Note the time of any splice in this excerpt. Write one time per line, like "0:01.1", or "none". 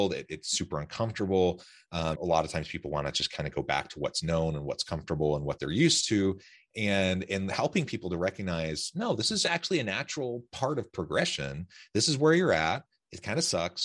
0:02.1

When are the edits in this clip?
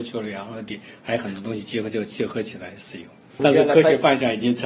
0:03.4

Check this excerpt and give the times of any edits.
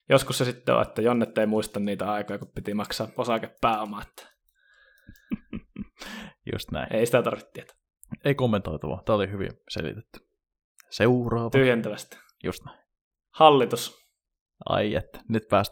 none

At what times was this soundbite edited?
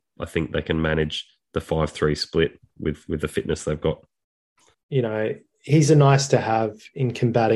0:04.7

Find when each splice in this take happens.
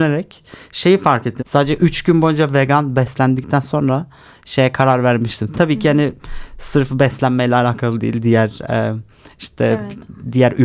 0:01.4
0:05.5

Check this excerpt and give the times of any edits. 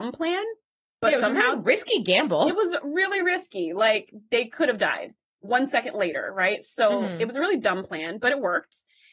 none

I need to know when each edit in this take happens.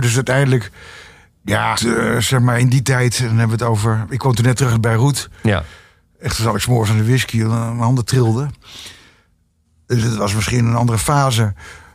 0:01.8

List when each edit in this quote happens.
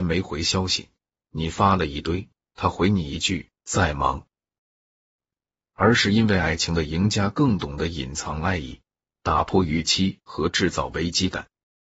0:05.3

